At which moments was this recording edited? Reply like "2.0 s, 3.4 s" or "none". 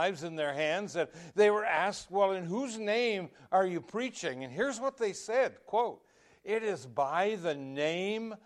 none